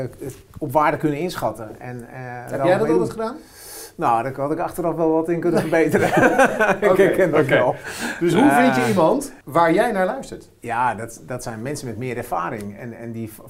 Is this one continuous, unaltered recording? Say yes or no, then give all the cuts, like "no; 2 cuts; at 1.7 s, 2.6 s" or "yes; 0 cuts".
no; 1 cut; at 9.4 s